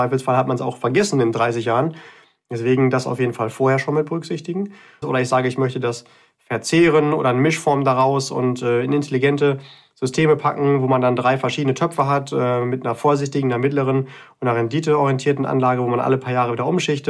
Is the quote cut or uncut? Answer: cut